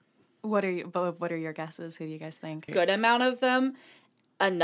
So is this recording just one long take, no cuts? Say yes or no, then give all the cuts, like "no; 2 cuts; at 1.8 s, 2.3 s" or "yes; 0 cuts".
no; 1 cut; at 2.7 s